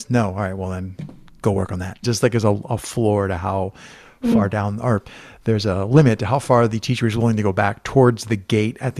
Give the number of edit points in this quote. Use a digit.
1